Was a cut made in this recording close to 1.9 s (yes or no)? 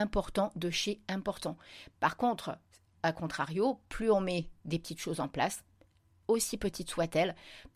yes